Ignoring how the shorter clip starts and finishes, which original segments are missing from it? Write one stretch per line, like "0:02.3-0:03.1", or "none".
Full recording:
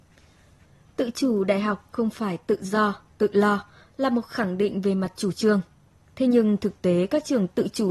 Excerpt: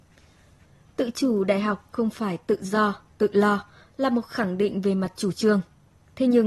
none

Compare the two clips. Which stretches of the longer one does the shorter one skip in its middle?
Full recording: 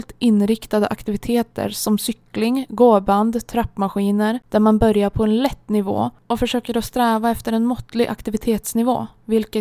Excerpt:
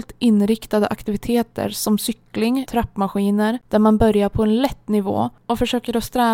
0:02.7-0:03.5

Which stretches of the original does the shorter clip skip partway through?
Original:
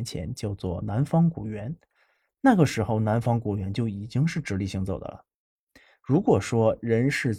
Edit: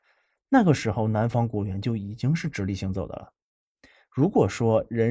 none

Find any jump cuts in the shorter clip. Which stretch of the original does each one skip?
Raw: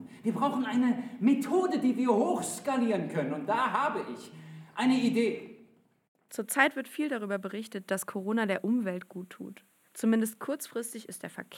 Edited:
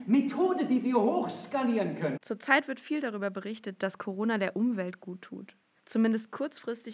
0:03.3-0:06.2

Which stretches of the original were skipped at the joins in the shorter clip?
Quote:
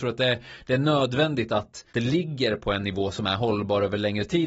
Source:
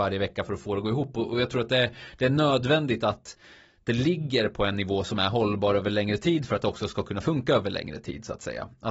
0:03.4-0:03.8

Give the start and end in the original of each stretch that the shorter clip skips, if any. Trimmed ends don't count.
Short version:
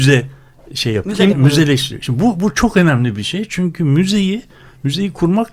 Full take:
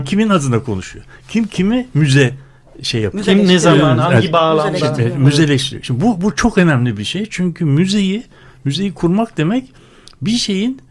0:03.4-0:05.1

